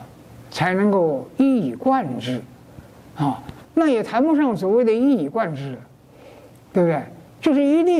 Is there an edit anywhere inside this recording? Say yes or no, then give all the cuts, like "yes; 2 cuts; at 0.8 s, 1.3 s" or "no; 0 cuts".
yes; 1 cut; at 3.6 s